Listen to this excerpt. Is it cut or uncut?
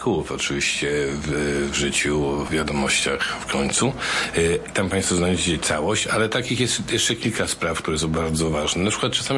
cut